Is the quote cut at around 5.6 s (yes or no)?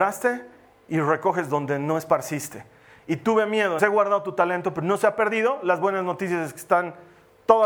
no